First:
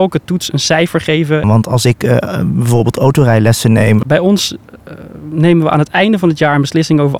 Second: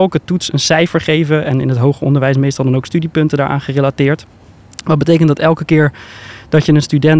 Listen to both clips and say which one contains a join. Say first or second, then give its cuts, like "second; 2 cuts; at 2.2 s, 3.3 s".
first; 2 cuts; at 1.4 s, 4.0 s